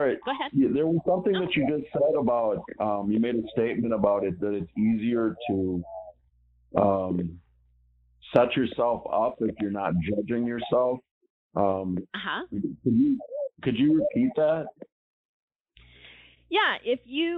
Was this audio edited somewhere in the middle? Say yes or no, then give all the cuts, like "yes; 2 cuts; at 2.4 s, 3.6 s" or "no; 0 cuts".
no; 0 cuts